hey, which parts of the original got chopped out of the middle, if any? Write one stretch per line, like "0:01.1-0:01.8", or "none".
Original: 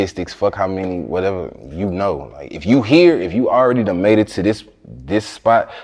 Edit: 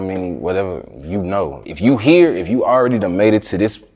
0:02.3-0:02.5